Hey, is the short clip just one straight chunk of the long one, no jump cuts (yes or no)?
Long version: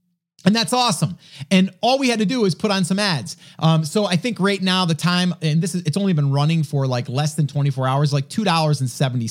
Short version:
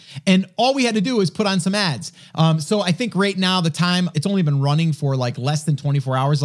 no